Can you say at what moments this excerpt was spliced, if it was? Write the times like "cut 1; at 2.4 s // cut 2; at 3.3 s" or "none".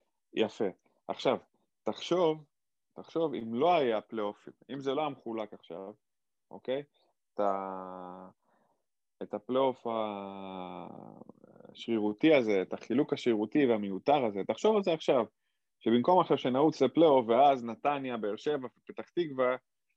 none

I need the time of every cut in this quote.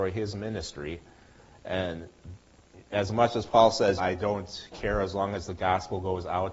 cut 1; at 4.0 s

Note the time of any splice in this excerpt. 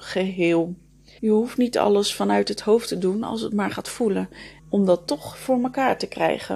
cut 1; at 1.2 s // cut 2; at 4.6 s

